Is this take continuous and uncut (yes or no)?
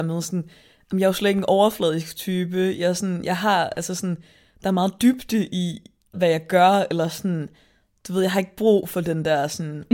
no